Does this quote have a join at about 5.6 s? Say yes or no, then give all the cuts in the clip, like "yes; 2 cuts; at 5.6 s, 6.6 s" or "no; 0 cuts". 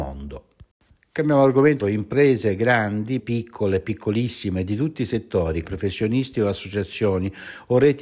yes; 3 cuts; at 1.8 s, 3.2 s, 5.6 s